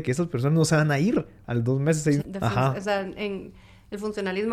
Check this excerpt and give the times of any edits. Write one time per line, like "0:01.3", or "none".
0:02.2